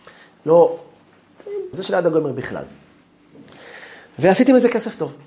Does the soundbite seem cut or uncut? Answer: cut